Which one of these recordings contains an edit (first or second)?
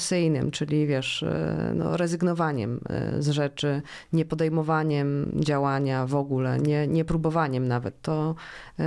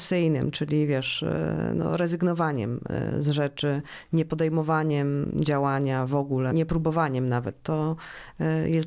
second